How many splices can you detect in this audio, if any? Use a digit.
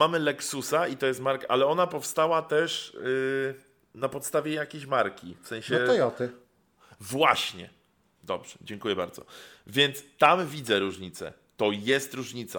0